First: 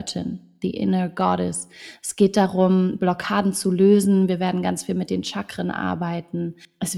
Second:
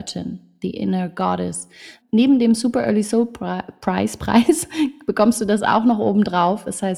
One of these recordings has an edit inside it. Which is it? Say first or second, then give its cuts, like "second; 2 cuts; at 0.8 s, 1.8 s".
second; 1 cut; at 2.0 s